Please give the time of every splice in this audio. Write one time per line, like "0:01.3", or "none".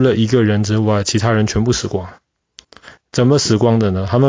none